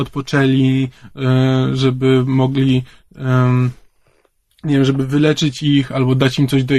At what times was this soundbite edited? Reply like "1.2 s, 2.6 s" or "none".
none